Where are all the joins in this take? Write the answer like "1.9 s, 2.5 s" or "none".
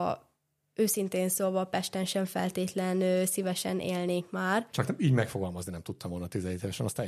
4.7 s